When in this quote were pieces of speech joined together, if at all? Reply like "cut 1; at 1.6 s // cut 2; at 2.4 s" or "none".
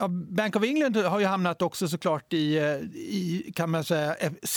none